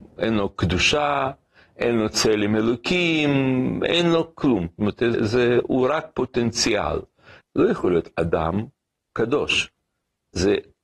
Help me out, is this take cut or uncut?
cut